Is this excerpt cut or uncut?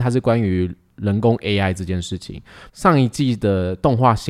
cut